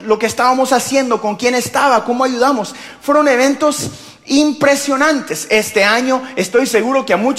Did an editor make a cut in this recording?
no; 0 cuts

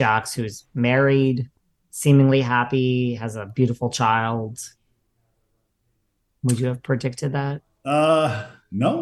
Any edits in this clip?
no; 0 cuts

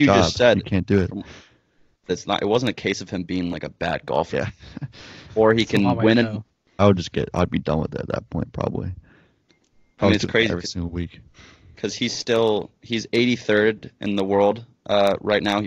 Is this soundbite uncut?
no; 3 cuts; at 2.1 s, 4.3 s, 6.8 s

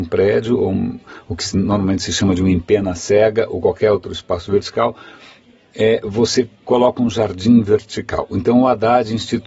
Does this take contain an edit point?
no; 0 cuts

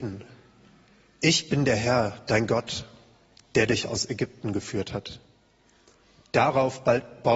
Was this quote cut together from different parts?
no; 0 cuts

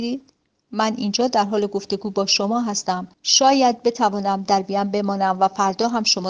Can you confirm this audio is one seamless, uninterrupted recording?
no; 1 cut; at 3.1 s

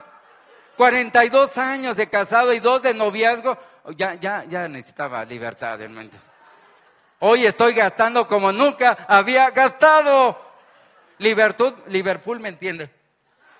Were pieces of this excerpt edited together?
no; 0 cuts

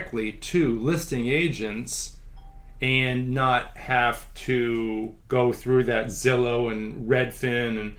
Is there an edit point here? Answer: yes; 1 cut; at 5.2 s

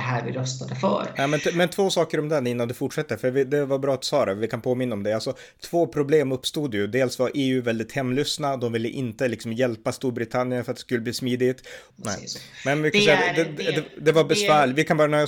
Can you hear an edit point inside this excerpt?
yes; 1 cut; at 11.9 s

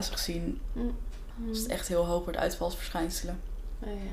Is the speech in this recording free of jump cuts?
no; 1 cut; at 1.3 s

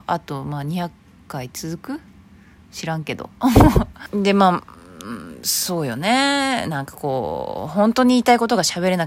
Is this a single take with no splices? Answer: no; 1 cut; at 4.1 s

